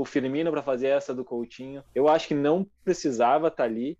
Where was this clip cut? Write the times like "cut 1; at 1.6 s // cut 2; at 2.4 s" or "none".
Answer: cut 1; at 1.8 s